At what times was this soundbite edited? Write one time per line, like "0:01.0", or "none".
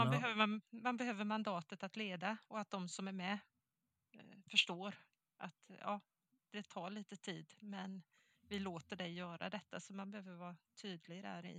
none